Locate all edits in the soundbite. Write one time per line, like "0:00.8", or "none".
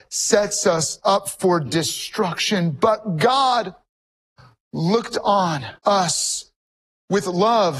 0:05.8